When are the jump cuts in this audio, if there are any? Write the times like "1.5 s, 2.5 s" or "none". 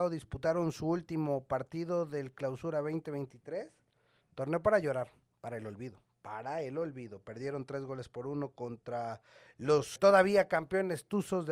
10.0 s